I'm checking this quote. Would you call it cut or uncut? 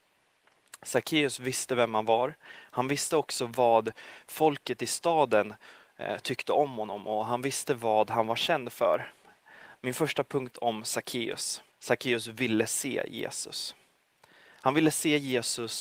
cut